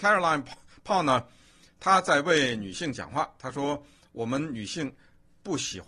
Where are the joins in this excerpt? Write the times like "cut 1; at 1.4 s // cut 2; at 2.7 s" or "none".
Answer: none